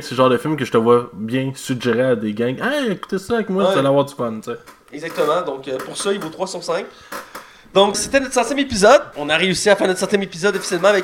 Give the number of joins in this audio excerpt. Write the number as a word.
two